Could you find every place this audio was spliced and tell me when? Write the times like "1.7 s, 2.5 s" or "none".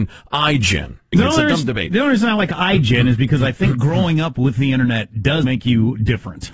1.1 s, 5.4 s